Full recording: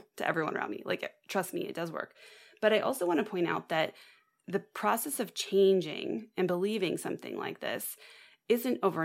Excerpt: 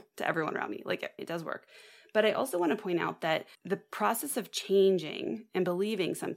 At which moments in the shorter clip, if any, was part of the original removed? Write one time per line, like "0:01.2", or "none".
0:01.2
0:03.5